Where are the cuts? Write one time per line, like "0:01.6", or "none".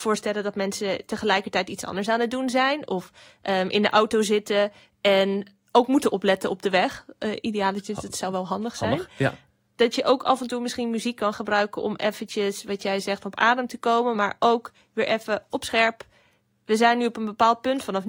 none